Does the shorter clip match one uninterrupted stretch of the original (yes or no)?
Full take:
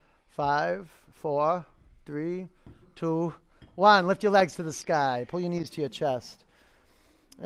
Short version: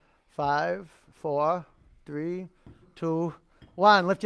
yes